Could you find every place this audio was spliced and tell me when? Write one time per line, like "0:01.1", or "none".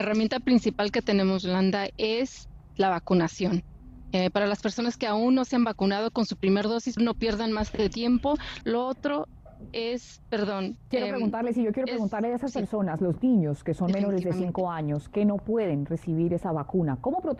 0:07.0
0:08.6